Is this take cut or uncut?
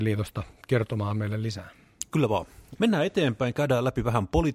cut